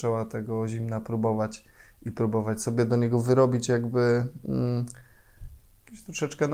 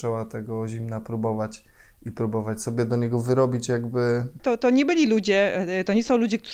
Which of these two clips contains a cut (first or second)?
second